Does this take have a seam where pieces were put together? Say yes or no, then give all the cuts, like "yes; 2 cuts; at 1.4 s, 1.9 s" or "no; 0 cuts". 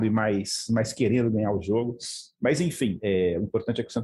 no; 0 cuts